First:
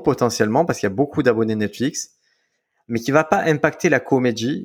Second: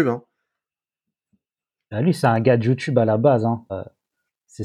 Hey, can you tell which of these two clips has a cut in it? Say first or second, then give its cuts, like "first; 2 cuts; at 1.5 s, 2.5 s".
second; 1 cut; at 3.7 s